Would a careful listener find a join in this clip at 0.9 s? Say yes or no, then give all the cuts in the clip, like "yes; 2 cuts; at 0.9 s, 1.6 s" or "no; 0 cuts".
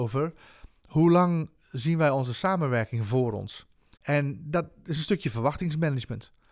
no; 1 cut; at 3.9 s